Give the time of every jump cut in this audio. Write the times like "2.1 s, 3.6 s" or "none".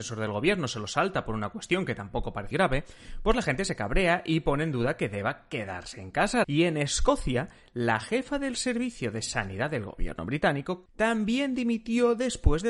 2.5 s, 6.4 s, 10.9 s